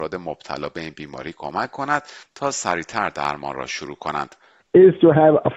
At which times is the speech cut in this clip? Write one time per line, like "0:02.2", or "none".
0:04.6